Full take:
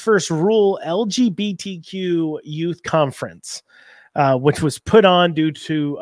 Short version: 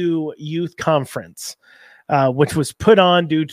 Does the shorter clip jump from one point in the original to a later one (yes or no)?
no